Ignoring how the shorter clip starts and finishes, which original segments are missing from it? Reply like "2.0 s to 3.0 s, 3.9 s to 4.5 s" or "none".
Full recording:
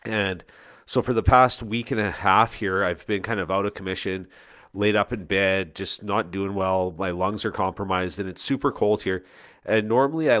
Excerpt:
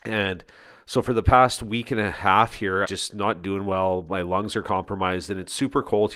2.8 s to 5.7 s